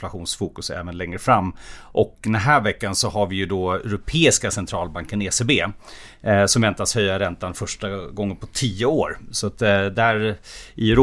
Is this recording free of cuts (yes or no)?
yes